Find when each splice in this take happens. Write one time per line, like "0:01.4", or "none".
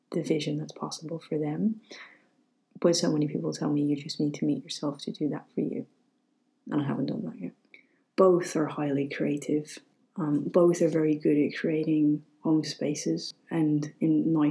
none